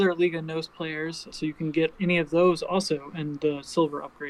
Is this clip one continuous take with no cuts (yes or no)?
no